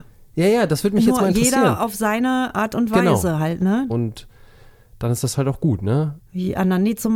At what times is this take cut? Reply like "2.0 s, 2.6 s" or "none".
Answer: 3.9 s, 6.2 s